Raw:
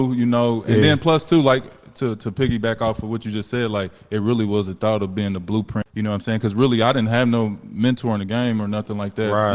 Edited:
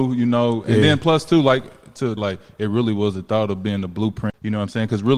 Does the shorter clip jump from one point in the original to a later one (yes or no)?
yes